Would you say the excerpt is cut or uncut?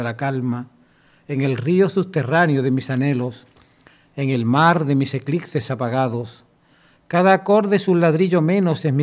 uncut